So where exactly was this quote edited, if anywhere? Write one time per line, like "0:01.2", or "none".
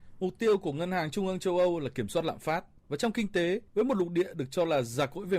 none